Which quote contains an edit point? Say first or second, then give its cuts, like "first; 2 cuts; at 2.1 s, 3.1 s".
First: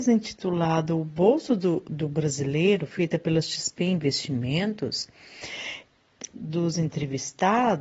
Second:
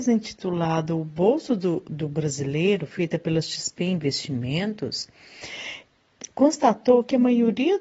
first; 1 cut; at 6.3 s